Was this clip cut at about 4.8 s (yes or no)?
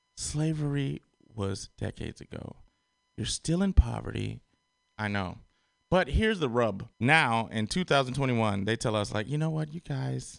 yes